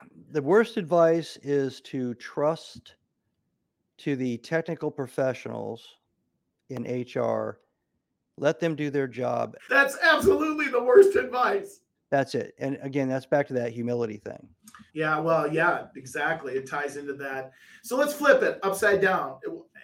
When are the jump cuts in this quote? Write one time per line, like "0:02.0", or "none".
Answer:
0:09.6
0:12.0
0:14.9